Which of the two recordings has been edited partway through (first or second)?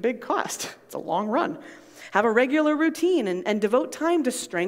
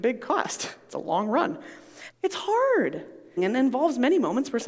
second